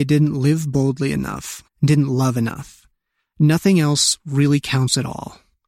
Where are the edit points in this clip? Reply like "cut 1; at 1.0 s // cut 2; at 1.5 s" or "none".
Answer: cut 1; at 1.7 s